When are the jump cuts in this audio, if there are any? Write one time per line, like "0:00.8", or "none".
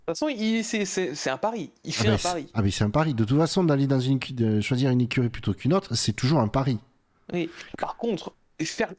none

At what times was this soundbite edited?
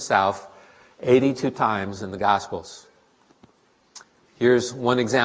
none

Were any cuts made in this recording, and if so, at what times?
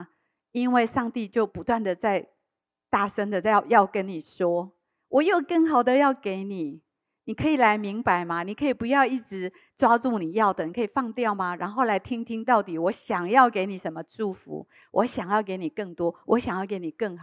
none

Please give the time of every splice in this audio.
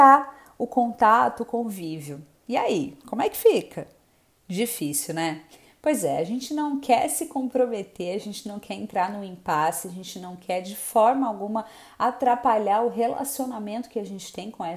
none

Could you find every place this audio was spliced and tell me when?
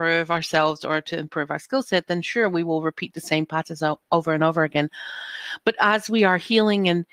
none

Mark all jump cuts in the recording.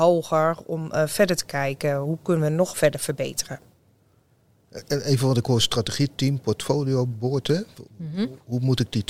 none

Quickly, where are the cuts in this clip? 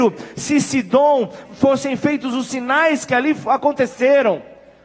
0:01.4

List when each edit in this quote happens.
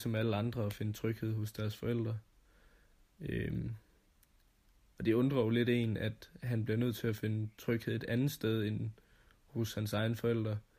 none

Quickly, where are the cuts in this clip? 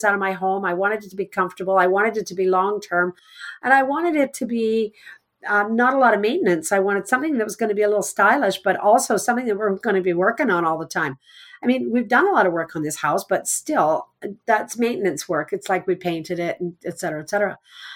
none

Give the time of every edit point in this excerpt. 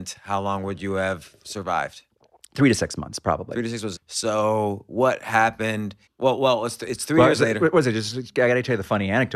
0:04.0
0:06.1

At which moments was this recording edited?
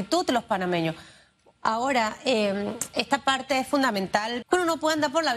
0:01.6
0:04.4

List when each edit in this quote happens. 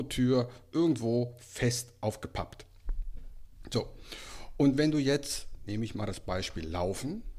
none

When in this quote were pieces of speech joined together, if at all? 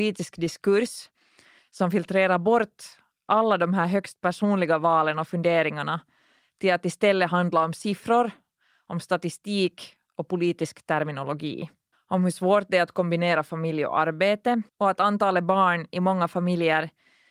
0:11.9
0:14.7

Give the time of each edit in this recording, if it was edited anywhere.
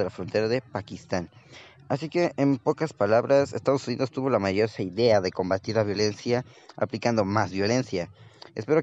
none

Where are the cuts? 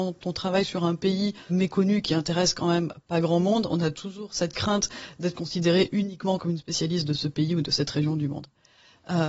0:01.5

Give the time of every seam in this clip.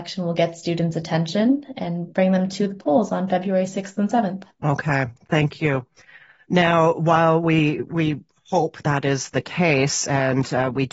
0:08.8

